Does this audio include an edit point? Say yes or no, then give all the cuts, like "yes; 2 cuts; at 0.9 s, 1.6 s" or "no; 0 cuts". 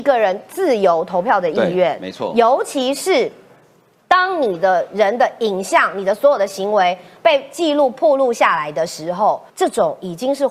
yes; 1 cut; at 9.5 s